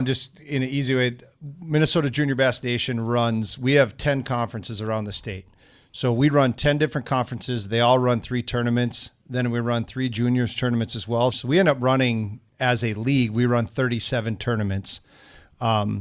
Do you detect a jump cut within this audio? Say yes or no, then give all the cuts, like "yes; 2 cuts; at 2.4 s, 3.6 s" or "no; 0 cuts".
yes; 1 cut; at 11.3 s